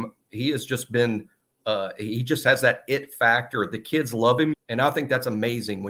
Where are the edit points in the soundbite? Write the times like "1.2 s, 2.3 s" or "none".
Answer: 4.5 s